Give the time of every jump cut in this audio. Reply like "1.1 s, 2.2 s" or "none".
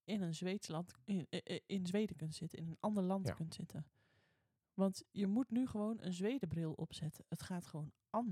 none